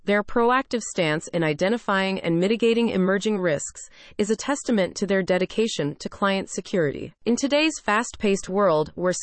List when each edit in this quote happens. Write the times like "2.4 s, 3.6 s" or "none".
7.2 s